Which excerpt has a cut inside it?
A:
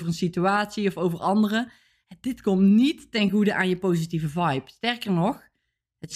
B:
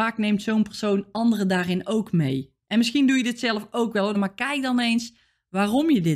B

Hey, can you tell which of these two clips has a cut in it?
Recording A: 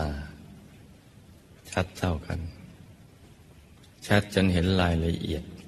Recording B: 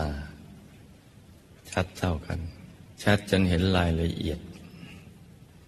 B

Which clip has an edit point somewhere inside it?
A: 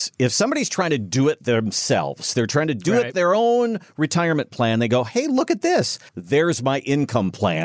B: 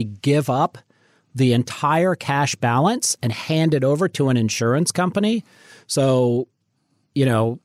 A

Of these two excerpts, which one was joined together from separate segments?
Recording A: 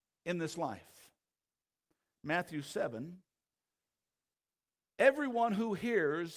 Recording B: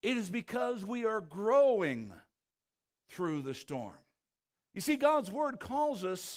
B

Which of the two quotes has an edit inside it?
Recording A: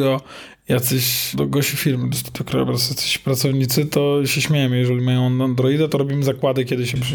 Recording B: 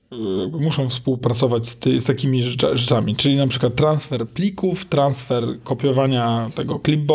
A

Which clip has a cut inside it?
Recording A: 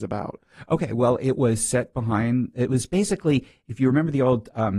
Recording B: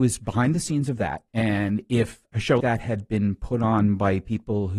B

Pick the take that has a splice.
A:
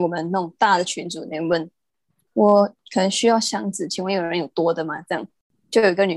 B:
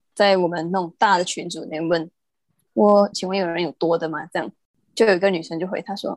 B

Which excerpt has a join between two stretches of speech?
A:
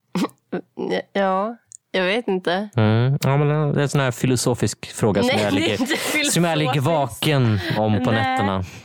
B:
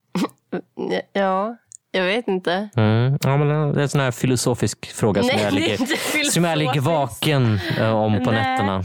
A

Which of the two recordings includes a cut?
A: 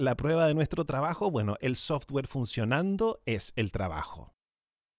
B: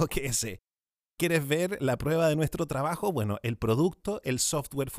A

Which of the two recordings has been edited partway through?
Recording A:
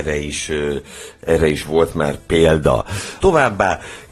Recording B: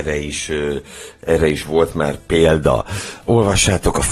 A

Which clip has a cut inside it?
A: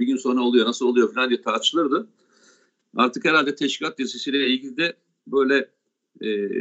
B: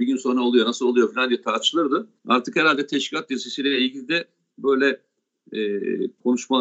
B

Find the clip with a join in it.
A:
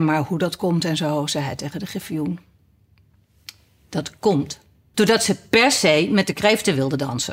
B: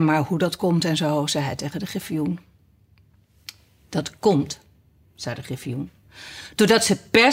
A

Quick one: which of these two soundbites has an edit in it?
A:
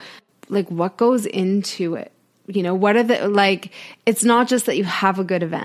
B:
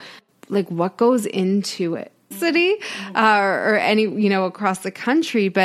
B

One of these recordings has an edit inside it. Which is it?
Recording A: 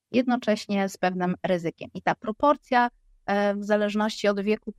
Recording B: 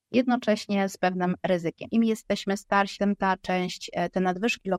B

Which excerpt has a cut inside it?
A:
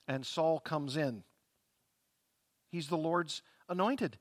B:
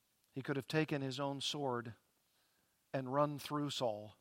A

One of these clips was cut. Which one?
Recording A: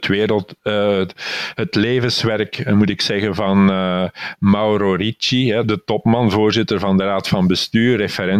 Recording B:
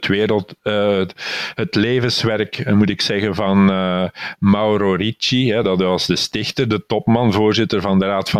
A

